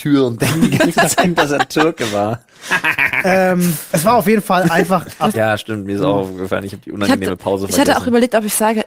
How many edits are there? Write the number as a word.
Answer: one